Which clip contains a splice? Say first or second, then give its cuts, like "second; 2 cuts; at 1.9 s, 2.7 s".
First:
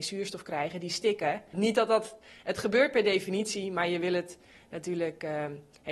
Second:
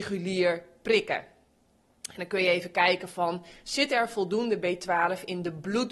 first; 1 cut; at 1.5 s